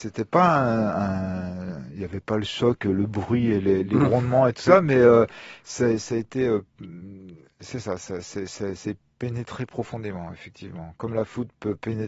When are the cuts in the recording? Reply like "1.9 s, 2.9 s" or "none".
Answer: none